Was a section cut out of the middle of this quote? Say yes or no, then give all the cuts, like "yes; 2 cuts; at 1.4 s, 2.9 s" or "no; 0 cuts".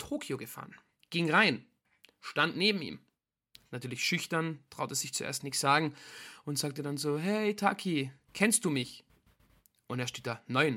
yes; 1 cut; at 1.0 s